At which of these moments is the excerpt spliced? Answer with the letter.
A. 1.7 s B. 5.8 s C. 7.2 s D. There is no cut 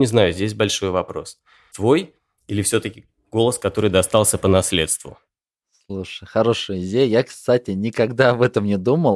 A